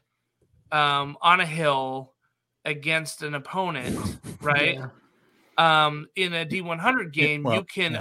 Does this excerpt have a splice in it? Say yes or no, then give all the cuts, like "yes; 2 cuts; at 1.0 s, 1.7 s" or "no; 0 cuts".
no; 0 cuts